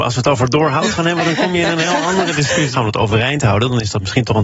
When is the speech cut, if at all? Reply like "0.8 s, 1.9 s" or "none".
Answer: 2.7 s